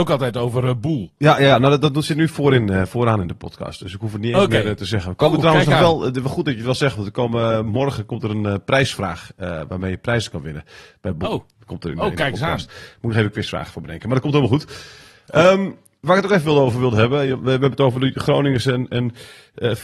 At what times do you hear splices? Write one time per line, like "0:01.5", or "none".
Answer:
none